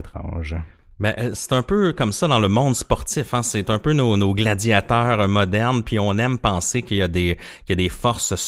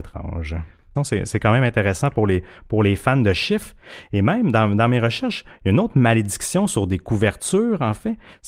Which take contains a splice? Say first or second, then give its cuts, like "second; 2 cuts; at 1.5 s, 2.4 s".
second; 2 cuts; at 1.0 s, 5.5 s